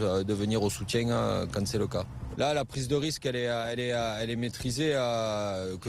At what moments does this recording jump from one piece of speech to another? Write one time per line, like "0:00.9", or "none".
0:02.3